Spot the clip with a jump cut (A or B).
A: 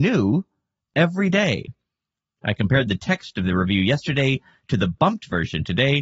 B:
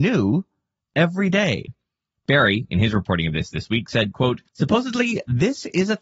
B